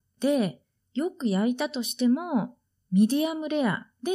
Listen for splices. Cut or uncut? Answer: uncut